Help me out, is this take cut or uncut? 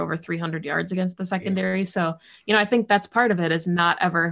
uncut